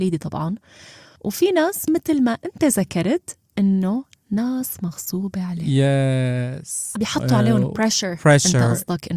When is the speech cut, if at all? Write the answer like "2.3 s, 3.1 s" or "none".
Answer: 6.9 s